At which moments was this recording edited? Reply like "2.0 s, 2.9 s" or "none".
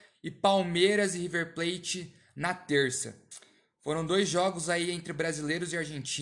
none